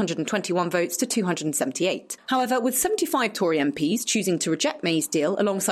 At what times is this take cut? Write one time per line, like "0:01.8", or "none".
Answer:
0:02.2